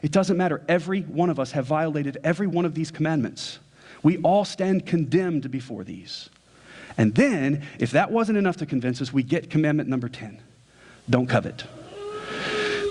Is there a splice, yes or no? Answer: no